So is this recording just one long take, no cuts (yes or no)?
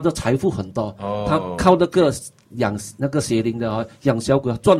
yes